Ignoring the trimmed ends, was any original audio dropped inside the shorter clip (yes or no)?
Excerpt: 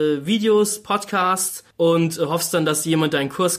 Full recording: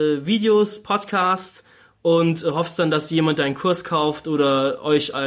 yes